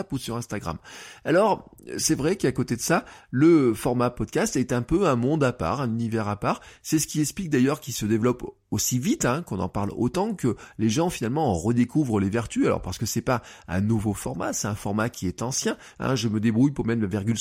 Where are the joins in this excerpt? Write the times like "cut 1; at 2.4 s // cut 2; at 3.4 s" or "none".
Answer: cut 1; at 15.9 s